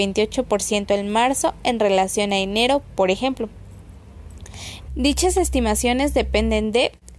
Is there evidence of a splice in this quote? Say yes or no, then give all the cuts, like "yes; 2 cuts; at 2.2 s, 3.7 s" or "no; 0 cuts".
yes; 1 cut; at 4.9 s